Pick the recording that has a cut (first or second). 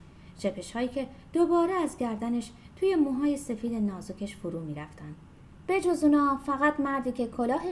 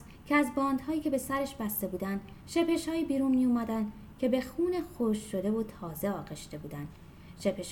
first